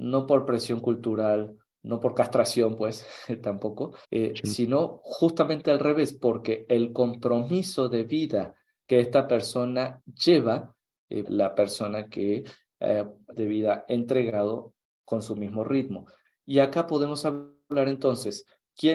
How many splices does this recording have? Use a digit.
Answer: 3